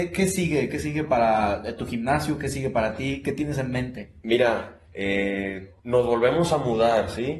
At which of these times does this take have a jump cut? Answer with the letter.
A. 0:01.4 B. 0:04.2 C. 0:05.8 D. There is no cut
C